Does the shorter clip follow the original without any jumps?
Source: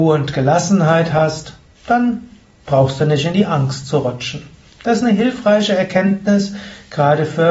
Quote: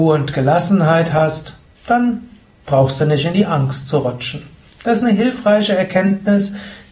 yes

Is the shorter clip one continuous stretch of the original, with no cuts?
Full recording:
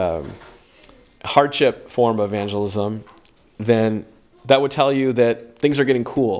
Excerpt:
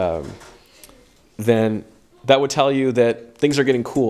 no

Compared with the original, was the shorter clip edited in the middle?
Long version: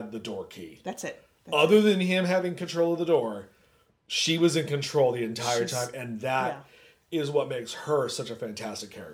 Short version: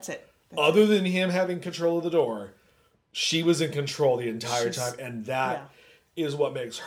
no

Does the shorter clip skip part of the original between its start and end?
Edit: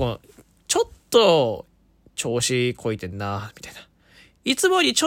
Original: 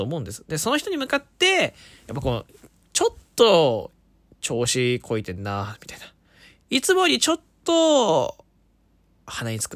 no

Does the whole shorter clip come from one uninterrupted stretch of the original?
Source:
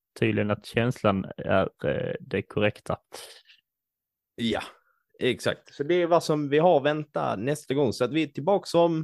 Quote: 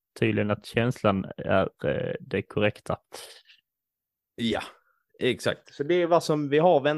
yes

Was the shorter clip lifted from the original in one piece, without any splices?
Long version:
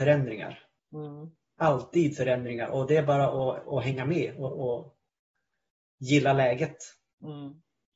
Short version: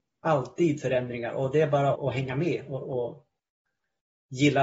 no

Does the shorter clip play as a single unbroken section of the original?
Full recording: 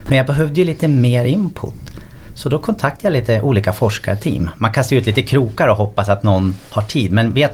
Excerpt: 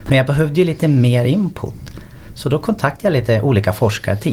yes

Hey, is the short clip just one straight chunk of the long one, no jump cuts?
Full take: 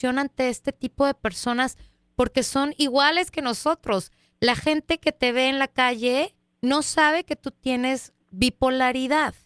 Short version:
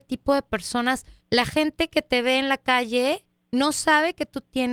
no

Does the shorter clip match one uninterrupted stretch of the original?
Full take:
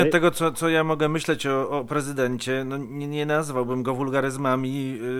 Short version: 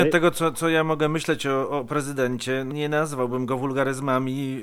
no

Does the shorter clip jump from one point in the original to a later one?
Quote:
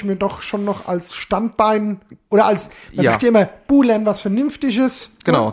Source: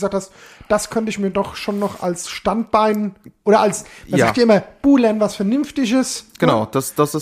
no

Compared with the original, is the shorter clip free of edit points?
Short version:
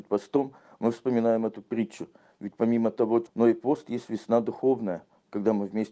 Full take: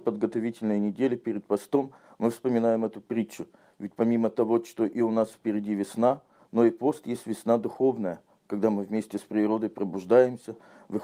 no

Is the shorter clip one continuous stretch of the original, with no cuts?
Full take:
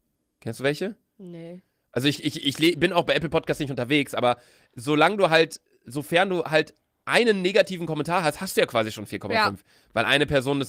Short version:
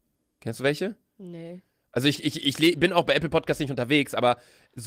yes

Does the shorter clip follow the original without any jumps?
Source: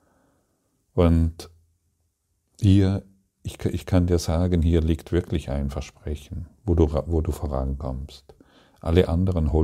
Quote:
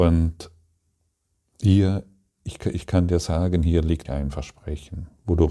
no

